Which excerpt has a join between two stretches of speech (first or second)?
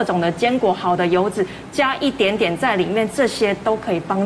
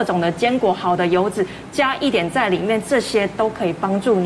second